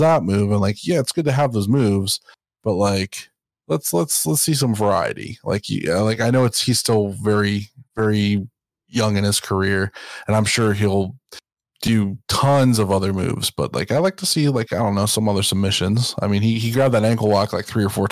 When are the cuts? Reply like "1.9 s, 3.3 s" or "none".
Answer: none